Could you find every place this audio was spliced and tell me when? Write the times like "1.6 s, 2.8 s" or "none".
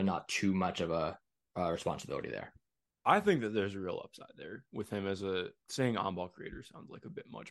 5.6 s

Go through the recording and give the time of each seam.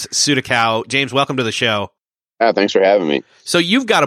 none

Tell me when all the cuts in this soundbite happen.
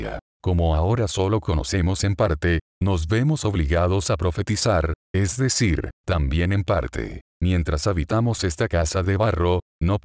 6.0 s

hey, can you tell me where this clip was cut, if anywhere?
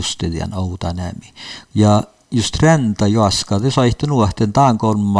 1.7 s

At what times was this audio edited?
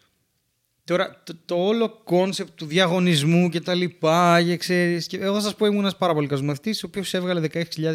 none

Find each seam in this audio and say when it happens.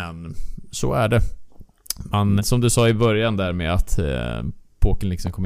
2.4 s

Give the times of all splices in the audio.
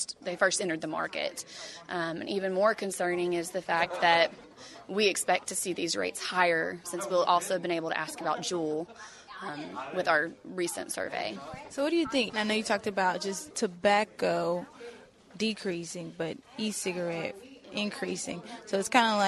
6.8 s, 12.3 s

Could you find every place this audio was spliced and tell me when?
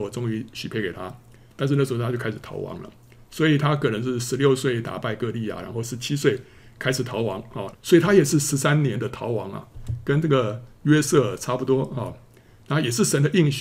7.7 s

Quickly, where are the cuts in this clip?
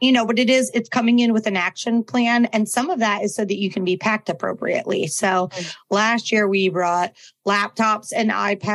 none

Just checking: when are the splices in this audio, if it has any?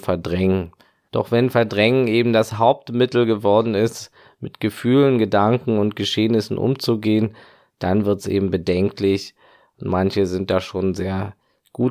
1.1 s

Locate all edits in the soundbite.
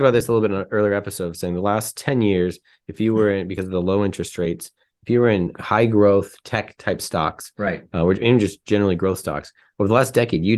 5.5 s

